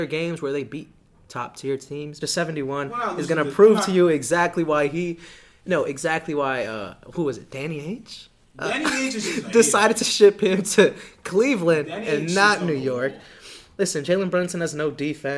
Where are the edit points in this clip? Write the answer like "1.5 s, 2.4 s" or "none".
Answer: 2.2 s